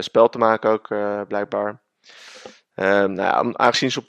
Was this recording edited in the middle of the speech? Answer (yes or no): no